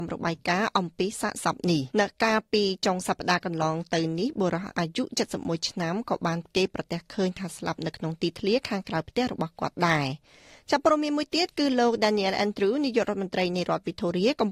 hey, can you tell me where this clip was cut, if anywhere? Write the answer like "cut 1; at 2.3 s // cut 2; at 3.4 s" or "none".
cut 1; at 1.9 s